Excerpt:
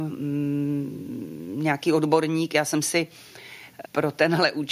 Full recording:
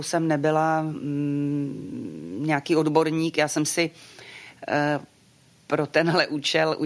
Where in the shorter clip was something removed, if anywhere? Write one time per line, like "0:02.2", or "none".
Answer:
0:03.8